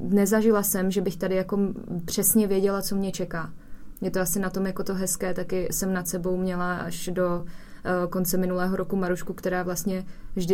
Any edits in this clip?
no; 0 cuts

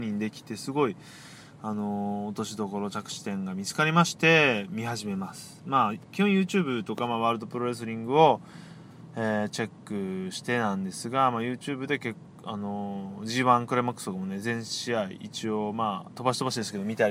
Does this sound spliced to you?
no; 0 cuts

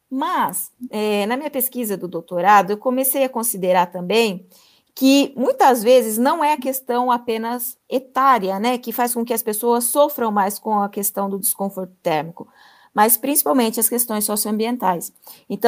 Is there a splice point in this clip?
no; 0 cuts

